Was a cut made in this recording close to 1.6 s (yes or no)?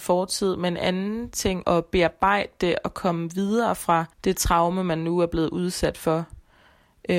yes